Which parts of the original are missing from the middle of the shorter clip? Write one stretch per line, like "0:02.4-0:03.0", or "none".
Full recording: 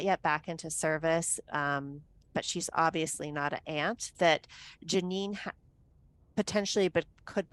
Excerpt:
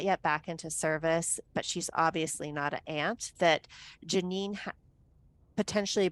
0:01.4-0:02.2

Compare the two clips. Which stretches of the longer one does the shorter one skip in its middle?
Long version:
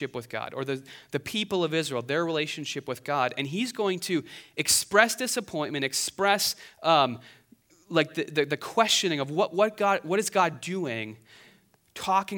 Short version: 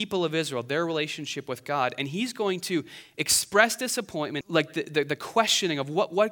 0:05.8-0:07.8

